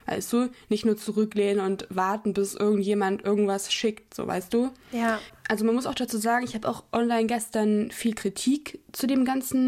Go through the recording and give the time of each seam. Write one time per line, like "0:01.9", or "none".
none

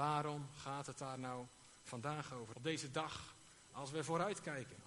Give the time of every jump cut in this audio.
0:02.5
0:03.7

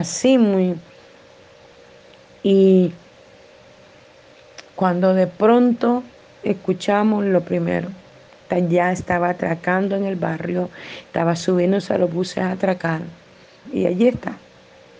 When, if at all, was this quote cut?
0:13.6

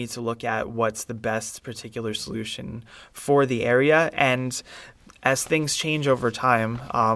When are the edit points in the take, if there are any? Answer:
none

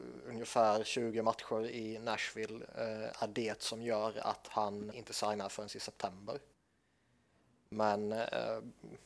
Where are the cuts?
0:04.9

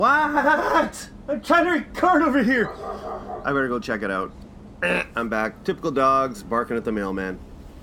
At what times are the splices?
0:03.4

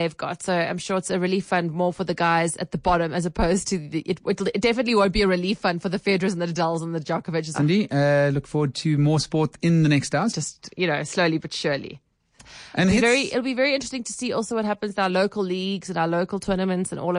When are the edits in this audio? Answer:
0:07.5
0:10.3

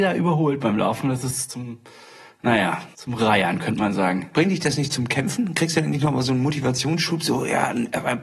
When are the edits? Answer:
0:02.9

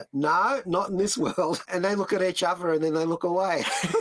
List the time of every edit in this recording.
0:01.6

